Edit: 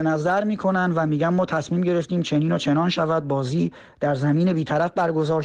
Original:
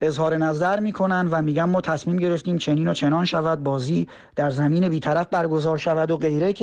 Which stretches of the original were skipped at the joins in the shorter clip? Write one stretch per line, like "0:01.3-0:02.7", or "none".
none